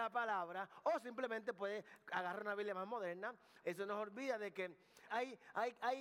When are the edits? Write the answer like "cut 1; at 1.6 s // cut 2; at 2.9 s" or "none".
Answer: cut 1; at 3.6 s // cut 2; at 5.1 s